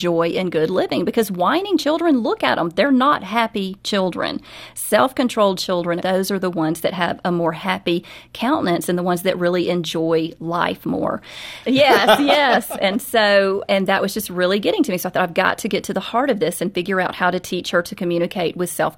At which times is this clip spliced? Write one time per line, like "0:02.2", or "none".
0:06.0
0:11.6